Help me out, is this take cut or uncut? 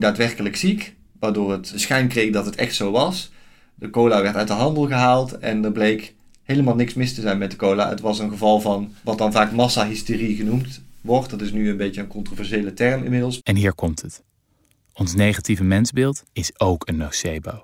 cut